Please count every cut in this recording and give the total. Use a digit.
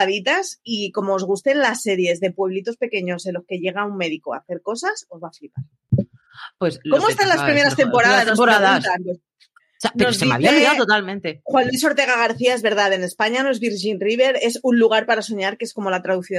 1